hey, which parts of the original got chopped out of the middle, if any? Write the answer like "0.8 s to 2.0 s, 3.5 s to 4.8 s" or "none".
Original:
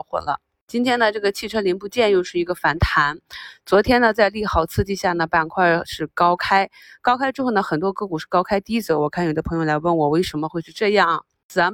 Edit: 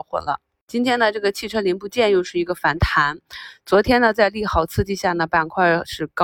none